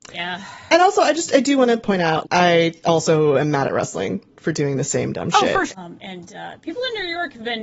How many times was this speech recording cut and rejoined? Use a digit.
2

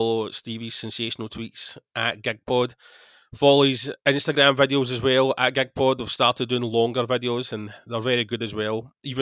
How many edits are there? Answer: 1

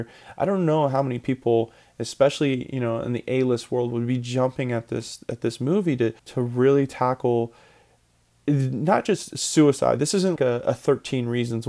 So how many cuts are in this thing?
2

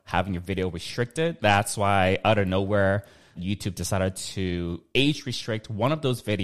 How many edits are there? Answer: 2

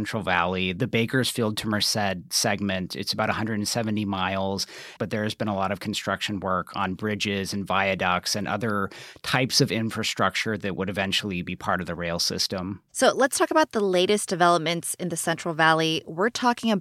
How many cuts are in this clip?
1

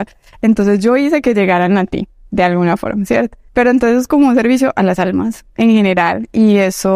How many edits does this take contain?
1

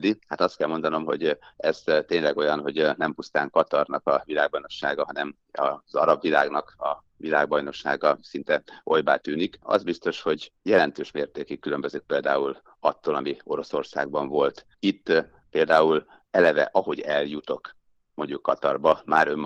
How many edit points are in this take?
1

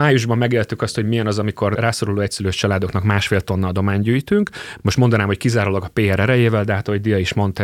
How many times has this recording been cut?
0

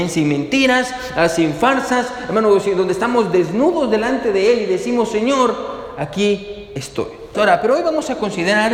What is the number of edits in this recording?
1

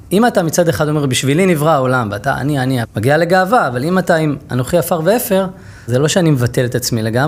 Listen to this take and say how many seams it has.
2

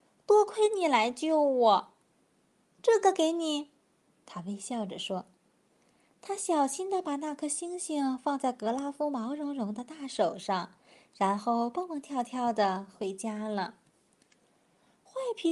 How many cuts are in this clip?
0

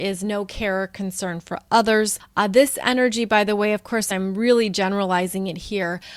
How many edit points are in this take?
0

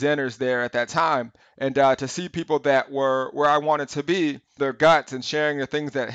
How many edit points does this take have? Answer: 2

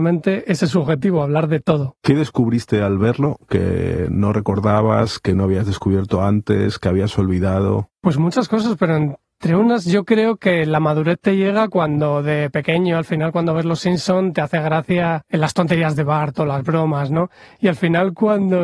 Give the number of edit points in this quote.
0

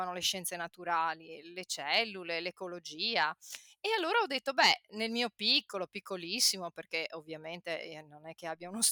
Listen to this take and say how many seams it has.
0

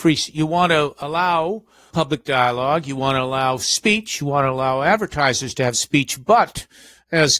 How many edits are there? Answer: 0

